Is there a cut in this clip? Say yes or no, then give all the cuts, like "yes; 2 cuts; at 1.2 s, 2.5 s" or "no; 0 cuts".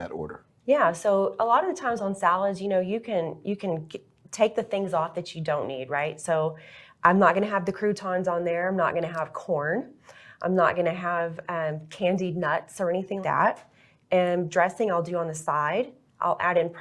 yes; 1 cut; at 13.2 s